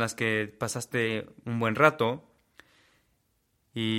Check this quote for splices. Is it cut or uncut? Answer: uncut